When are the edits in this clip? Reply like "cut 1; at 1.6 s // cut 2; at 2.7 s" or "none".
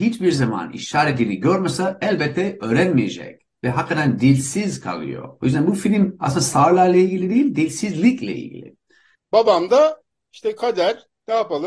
cut 1; at 9.1 s